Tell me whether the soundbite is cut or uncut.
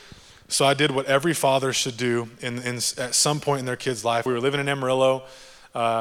cut